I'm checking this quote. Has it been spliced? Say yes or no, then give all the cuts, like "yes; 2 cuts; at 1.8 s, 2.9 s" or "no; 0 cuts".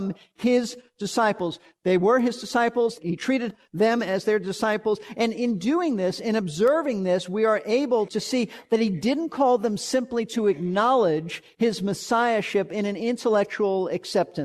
no; 0 cuts